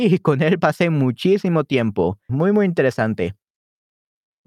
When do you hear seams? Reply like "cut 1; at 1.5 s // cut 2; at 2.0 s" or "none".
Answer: cut 1; at 2.3 s